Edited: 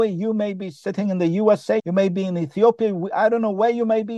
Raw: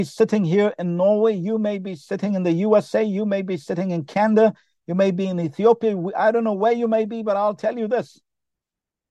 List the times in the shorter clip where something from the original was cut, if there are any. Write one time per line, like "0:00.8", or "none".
0:01.8